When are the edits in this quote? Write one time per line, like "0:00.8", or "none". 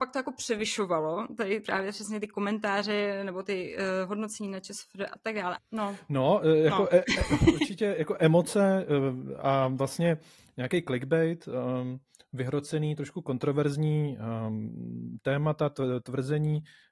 0:05.6